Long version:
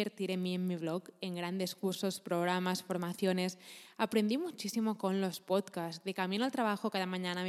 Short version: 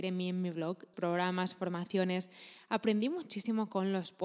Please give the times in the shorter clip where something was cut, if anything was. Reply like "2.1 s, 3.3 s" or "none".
0.9 s